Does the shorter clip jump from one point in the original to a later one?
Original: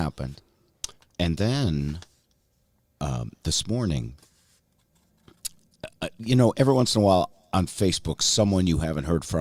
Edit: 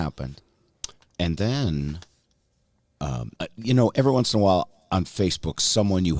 yes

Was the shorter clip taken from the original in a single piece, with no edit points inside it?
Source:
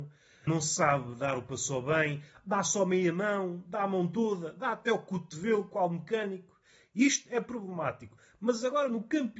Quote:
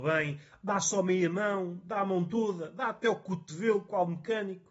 yes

